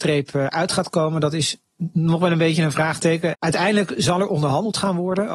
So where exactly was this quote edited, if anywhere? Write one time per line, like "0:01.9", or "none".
0:03.3